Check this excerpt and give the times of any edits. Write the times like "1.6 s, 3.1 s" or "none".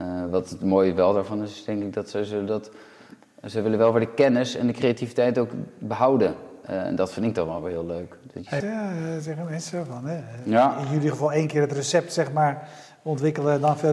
8.6 s